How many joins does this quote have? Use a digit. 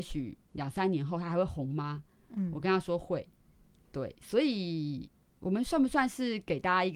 0